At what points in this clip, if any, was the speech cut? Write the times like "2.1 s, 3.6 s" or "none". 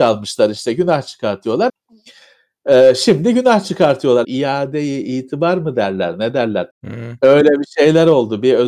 1.7 s, 4.2 s, 6.7 s